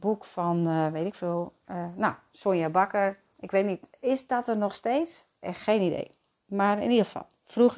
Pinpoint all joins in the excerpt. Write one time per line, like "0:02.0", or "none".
none